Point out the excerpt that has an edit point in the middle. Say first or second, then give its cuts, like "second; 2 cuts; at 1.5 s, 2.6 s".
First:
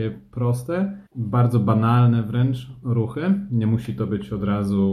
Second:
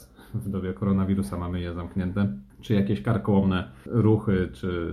first; 1 cut; at 1.1 s